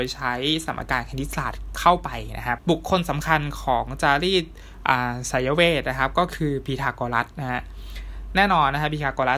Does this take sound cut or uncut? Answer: cut